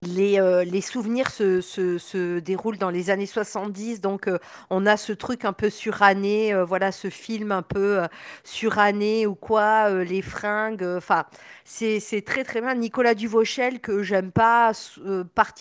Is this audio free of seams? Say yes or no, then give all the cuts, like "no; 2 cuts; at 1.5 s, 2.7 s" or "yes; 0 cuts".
yes; 0 cuts